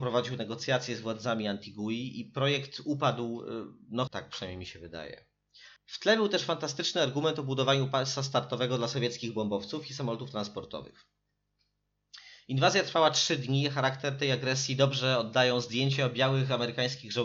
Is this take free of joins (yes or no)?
no